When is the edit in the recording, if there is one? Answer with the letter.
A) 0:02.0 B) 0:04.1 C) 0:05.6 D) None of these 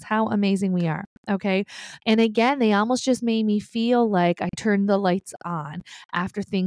A